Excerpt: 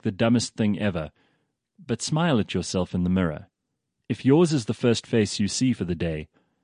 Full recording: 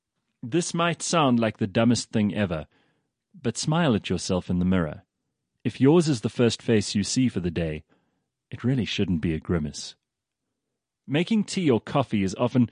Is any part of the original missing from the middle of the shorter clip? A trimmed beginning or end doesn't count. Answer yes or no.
no